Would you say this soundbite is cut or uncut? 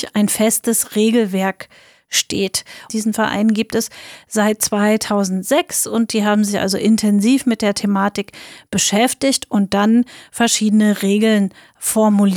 cut